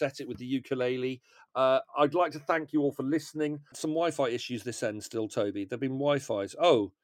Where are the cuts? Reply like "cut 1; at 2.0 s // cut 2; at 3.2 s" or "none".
cut 1; at 3.7 s